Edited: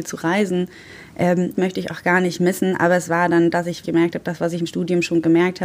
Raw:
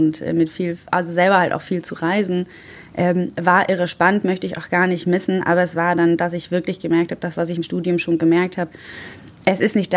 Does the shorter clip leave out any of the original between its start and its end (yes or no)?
yes